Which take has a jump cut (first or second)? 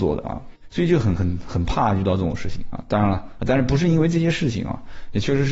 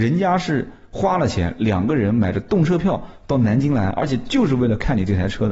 first